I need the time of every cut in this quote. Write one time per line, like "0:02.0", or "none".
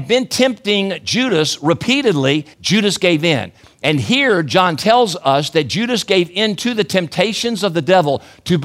0:02.5